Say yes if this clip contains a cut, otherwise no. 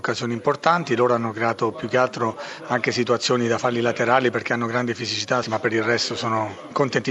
yes